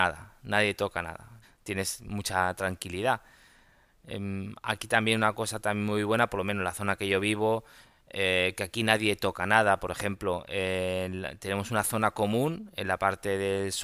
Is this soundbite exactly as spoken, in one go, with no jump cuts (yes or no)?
no